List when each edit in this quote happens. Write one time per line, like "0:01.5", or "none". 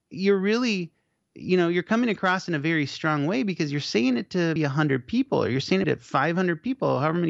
0:04.6
0:05.8